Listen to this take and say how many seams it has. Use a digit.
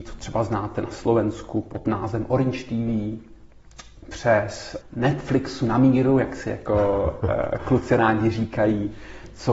1